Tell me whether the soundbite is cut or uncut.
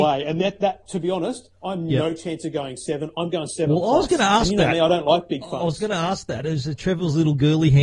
uncut